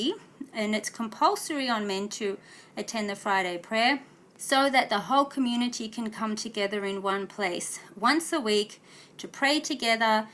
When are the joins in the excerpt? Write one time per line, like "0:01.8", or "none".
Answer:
none